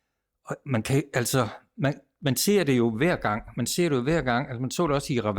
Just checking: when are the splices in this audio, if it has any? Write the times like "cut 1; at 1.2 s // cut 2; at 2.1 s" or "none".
none